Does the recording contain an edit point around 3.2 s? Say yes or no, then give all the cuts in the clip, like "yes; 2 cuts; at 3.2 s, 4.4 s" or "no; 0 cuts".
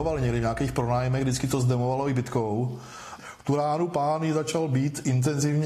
yes; 1 cut; at 3.2 s